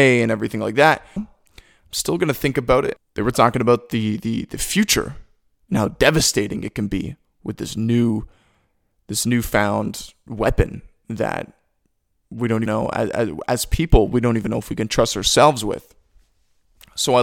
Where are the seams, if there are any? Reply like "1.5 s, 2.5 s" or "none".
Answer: 1.2 s, 3.0 s, 12.7 s